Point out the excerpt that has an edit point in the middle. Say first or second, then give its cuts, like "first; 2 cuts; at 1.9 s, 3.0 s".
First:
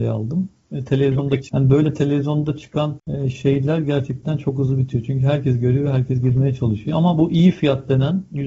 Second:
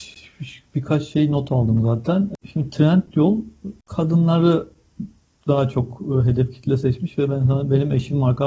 first; 1 cut; at 1.5 s